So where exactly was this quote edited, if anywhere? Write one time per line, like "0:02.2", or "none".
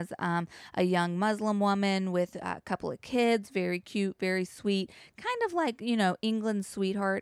none